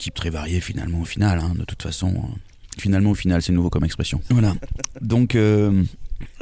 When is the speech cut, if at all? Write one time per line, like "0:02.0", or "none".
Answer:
0:04.3